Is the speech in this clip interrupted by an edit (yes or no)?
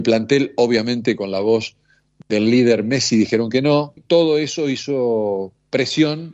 yes